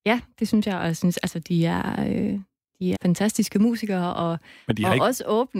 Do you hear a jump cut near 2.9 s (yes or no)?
yes